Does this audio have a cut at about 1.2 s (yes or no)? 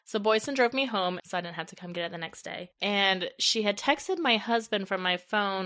yes